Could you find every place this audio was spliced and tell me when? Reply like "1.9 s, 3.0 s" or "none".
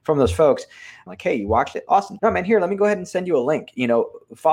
1.1 s, 2.2 s